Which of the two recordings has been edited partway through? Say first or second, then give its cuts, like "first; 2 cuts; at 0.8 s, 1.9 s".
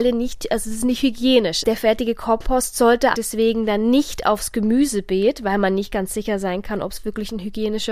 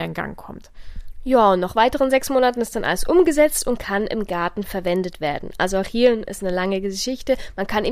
first; 2 cuts; at 1.6 s, 3.1 s